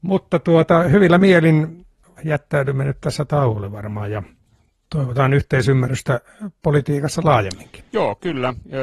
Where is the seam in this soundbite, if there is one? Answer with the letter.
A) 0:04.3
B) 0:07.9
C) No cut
B